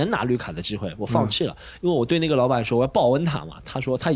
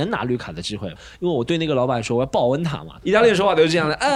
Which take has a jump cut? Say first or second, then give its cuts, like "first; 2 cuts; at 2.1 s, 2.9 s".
second; 2 cuts; at 0.9 s, 3.0 s